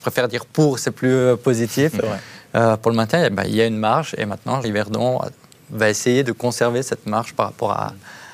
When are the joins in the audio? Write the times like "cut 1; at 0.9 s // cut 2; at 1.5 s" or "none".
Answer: cut 1; at 3.5 s // cut 2; at 4.6 s